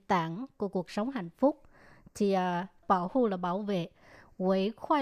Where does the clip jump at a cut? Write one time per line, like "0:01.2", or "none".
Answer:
0:02.8